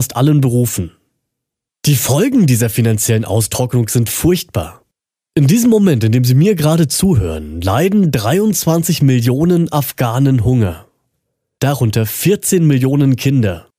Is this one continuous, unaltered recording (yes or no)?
yes